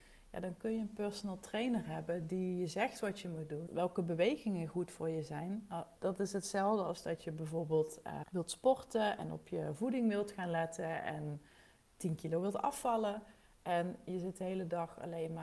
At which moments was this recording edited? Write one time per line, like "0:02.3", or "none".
0:03.7
0:06.0
0:08.2